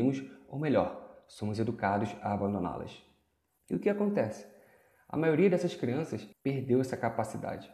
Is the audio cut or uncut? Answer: cut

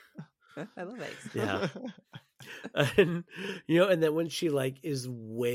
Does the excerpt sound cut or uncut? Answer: uncut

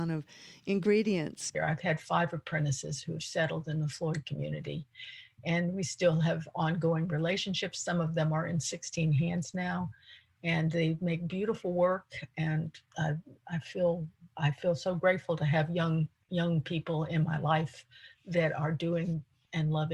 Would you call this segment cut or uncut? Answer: cut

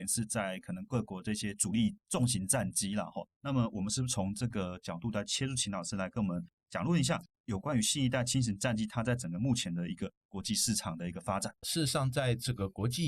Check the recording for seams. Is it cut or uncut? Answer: cut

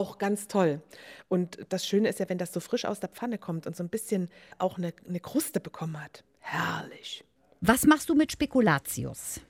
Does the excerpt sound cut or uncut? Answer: uncut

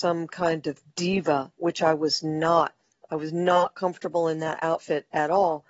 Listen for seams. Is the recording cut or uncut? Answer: uncut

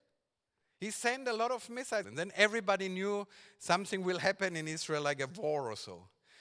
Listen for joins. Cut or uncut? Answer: cut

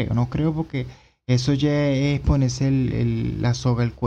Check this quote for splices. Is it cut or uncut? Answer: uncut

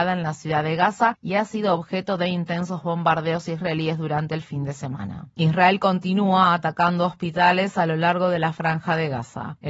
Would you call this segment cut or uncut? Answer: uncut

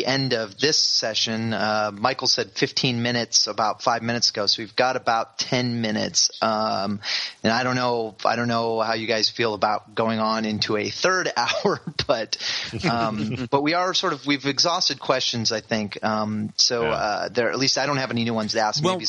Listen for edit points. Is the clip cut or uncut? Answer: uncut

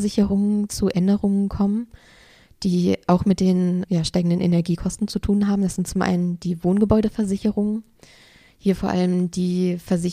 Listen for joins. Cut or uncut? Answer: uncut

